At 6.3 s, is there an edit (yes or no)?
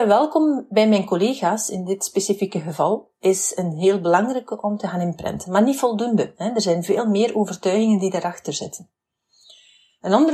no